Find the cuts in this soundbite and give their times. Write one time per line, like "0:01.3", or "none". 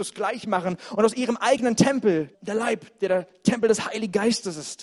0:02.3